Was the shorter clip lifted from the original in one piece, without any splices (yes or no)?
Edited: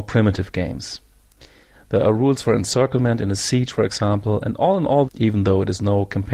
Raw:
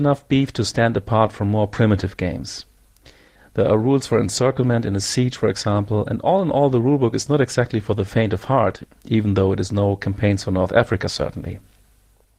no